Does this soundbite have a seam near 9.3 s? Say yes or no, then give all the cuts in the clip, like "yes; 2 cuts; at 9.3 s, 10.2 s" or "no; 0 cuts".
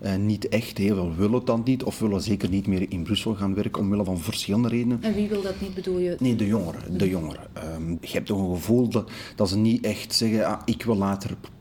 no; 2 cuts; at 6.2 s, 8.0 s